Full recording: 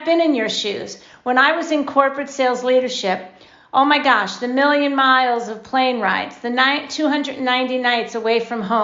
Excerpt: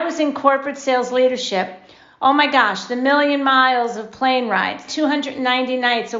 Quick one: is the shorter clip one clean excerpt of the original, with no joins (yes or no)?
no